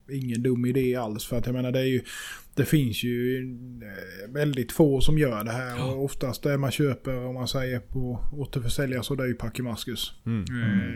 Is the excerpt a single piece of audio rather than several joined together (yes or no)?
yes